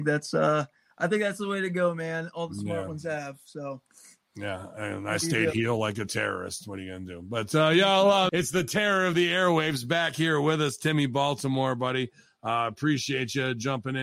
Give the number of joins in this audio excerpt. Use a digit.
1